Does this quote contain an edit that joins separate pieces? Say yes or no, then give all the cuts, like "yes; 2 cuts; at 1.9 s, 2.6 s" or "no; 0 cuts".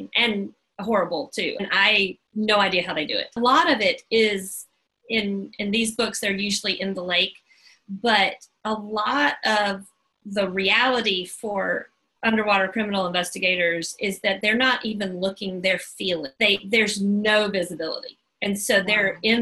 yes; 1 cut; at 3.4 s